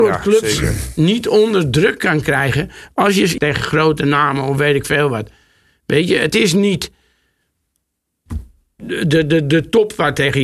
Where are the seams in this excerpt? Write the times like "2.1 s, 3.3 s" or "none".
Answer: 3.4 s